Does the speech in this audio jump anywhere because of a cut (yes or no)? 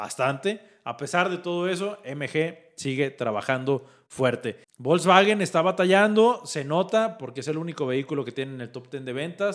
yes